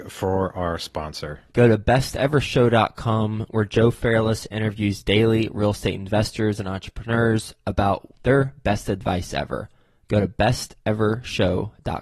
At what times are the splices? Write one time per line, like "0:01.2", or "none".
0:01.5